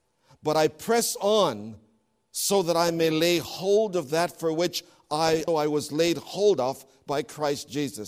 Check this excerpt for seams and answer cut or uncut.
cut